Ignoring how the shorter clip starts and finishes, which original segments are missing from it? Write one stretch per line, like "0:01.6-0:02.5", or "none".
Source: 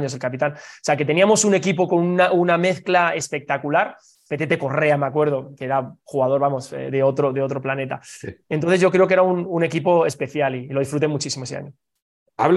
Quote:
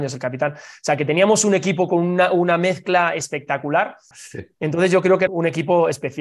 0:04.1-0:08.0
0:09.2-0:09.4